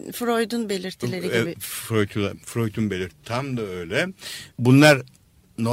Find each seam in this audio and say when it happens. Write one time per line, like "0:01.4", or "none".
0:04.5

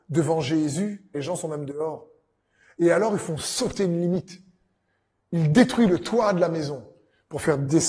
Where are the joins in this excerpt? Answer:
0:01.1

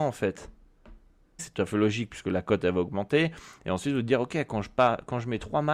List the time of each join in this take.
0:01.4

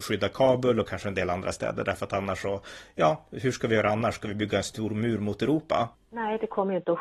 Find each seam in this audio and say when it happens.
0:05.9

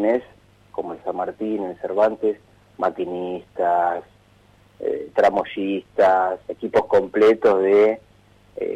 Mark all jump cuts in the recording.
0:06.5

